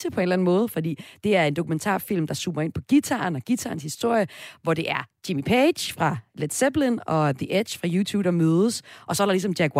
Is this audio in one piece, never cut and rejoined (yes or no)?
yes